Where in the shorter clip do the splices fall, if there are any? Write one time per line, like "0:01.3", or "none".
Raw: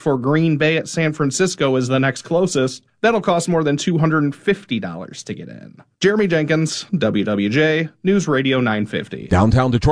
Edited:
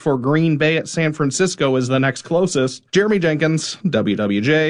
0:02.9